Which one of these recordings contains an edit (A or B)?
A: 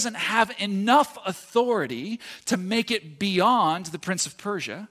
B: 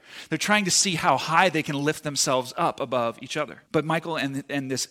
B